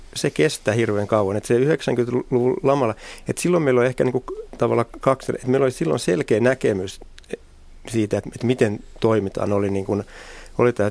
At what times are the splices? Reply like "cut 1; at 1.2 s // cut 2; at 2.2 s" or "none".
none